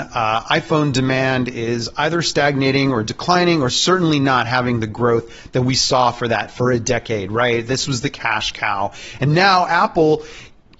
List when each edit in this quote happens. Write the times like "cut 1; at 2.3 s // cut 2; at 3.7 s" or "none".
none